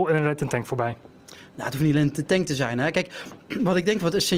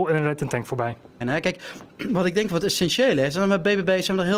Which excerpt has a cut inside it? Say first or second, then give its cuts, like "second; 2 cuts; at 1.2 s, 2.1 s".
second; 1 cut; at 1.2 s